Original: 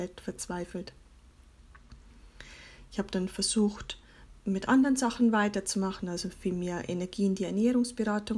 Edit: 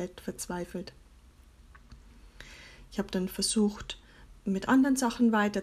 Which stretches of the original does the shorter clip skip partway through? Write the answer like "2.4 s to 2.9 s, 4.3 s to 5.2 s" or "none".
none